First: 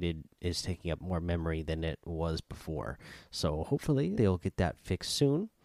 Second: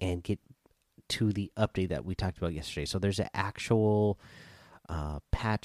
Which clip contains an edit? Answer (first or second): first